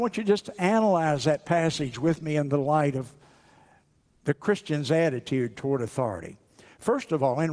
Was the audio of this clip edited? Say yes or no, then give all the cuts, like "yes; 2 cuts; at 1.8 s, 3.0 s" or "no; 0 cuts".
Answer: no; 0 cuts